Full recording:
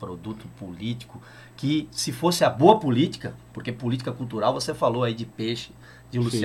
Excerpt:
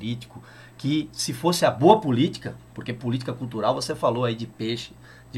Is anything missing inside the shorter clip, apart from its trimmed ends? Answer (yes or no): no